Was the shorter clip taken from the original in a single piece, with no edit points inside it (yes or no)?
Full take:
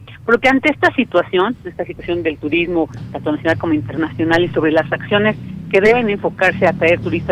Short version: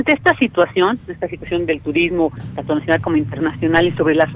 yes